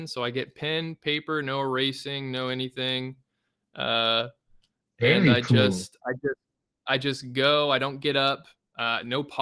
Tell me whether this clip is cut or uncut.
uncut